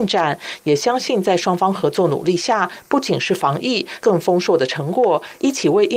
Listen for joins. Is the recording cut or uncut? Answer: cut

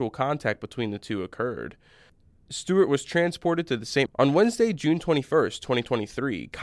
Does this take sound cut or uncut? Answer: cut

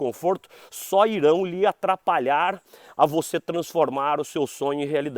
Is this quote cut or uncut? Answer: uncut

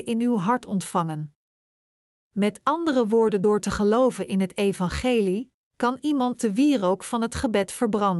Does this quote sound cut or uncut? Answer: uncut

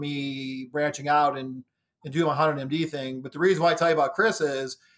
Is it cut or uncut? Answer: uncut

